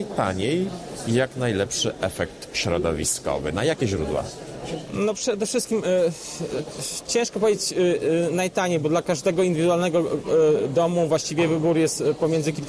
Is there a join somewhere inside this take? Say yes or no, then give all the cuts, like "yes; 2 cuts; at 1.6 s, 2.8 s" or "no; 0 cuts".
no; 0 cuts